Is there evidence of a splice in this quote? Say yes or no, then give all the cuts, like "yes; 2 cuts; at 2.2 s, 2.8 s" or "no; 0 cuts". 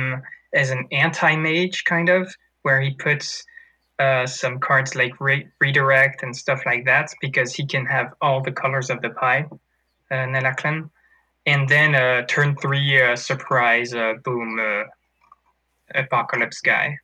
no; 0 cuts